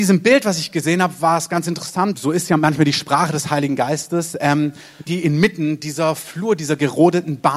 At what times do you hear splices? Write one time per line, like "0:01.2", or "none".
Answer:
0:02.1
0:05.1